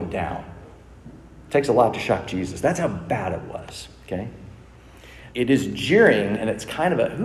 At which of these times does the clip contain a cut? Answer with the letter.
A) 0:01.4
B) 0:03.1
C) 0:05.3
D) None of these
C